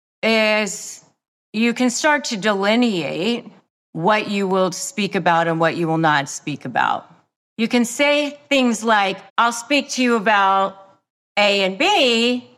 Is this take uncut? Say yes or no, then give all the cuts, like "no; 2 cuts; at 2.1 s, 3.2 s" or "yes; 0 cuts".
no; 1 cut; at 9.3 s